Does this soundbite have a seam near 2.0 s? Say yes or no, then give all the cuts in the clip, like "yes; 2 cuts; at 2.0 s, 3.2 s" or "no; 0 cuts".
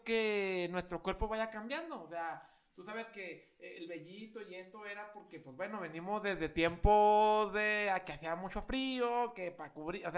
no; 0 cuts